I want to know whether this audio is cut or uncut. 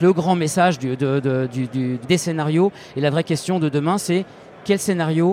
cut